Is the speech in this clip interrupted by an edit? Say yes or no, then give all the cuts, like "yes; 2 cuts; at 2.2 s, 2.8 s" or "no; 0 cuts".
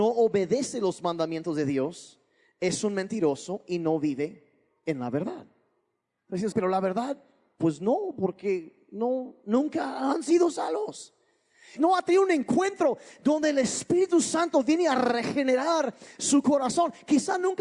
yes; 2 cuts; at 6.5 s, 11.8 s